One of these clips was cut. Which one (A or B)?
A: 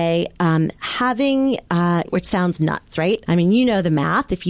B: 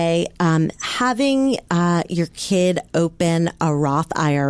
A